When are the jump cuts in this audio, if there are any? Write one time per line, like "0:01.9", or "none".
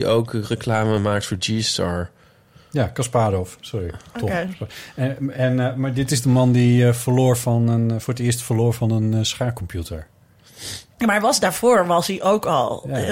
none